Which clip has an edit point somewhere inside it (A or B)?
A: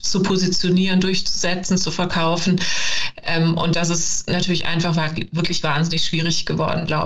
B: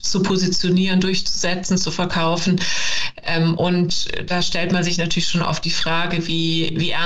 B